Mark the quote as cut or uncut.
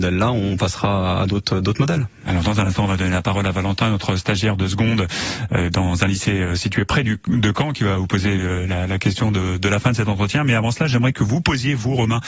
uncut